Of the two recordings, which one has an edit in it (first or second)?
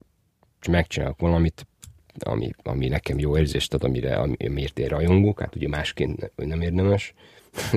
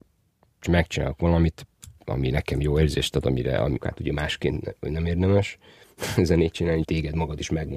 second